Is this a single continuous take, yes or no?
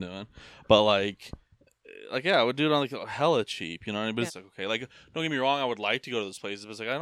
no